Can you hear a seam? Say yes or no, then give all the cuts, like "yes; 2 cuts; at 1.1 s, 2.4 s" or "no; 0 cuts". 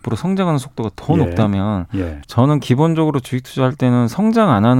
yes; 1 cut; at 2.2 s